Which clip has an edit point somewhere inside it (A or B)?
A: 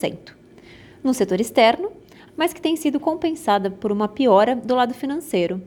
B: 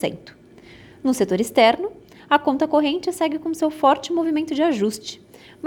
A